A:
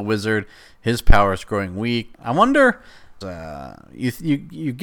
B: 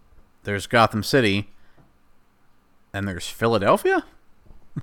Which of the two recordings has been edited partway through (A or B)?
A